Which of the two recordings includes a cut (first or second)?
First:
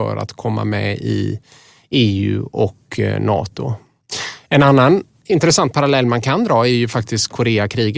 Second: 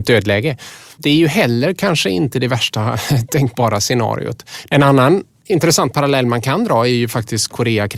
second